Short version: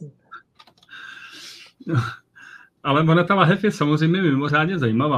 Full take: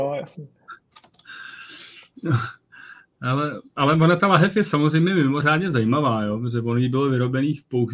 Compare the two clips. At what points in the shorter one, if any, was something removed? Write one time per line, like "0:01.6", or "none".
0:02.8

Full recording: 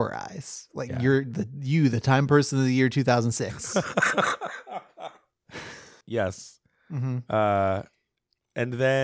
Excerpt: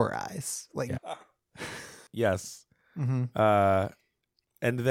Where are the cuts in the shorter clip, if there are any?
0:00.9

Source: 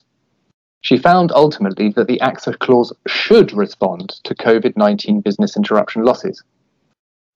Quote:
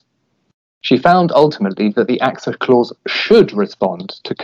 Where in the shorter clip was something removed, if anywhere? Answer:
none

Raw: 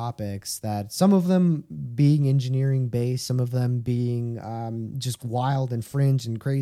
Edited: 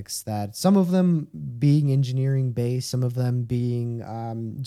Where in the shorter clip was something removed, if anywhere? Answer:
none

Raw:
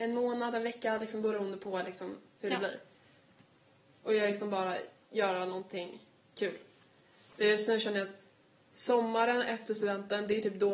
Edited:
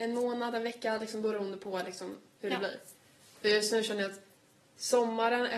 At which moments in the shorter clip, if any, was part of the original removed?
0:03.2

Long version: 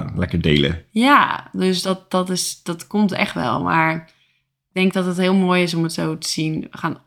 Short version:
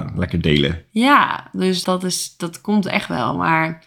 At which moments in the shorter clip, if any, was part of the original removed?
0:01.8

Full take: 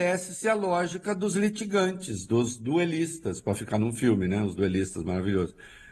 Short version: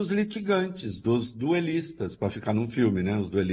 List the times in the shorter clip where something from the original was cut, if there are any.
none

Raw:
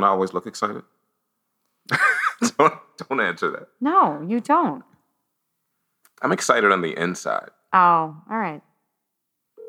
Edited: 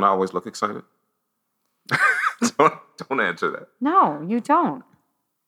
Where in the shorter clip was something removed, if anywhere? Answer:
none

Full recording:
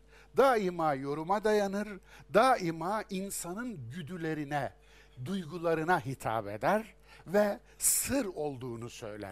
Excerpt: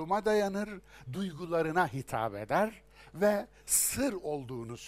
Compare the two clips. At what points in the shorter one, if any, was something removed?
0:01.1

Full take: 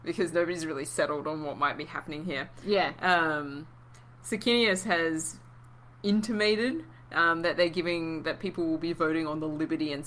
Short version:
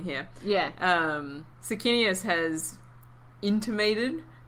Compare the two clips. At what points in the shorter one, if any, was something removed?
0:01.5

